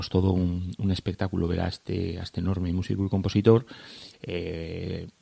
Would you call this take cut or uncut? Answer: cut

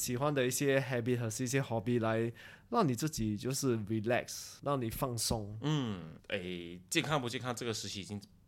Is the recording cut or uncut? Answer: cut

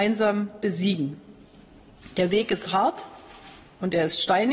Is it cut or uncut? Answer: uncut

